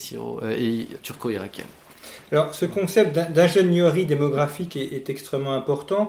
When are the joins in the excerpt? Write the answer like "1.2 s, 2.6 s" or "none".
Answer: 1.0 s